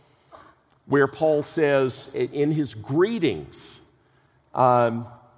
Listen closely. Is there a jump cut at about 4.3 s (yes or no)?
no